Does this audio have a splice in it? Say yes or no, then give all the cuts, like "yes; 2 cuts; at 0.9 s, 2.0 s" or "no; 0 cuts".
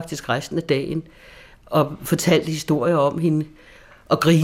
no; 0 cuts